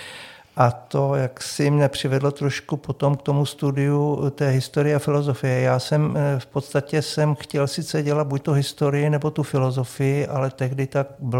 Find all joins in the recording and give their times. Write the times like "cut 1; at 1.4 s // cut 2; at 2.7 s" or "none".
none